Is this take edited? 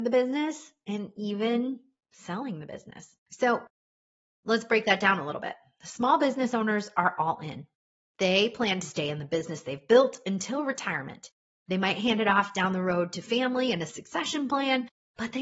yes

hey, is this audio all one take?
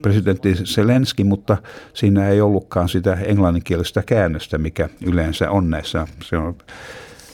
yes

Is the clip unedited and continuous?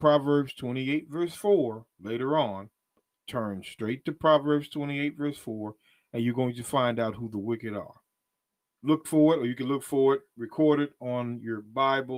no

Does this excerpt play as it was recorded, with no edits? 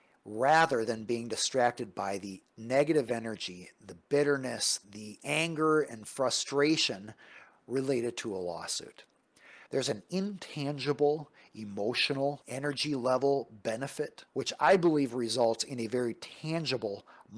no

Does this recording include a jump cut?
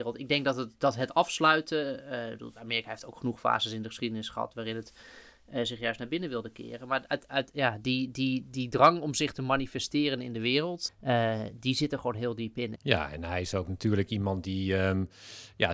yes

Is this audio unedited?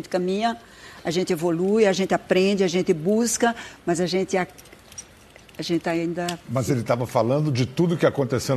yes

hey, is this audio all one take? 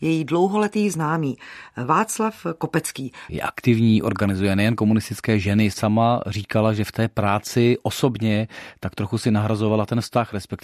no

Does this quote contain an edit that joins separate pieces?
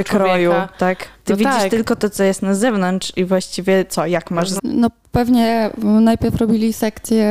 yes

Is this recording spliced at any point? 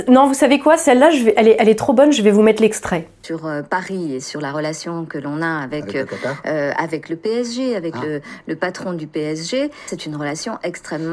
no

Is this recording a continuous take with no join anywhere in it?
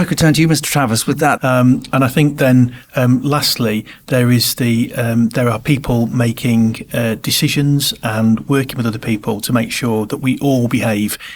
no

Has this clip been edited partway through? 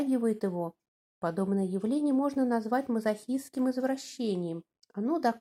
no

